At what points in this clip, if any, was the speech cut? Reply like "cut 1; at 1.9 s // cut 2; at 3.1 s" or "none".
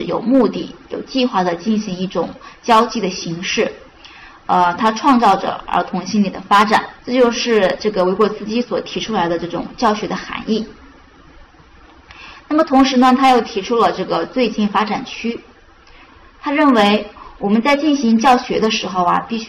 cut 1; at 7.0 s